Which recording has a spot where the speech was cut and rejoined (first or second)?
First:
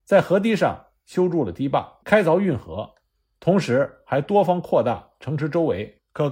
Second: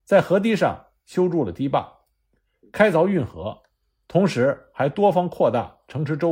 first